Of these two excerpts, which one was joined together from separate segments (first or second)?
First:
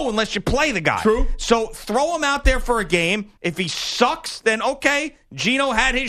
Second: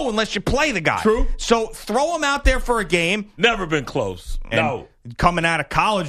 second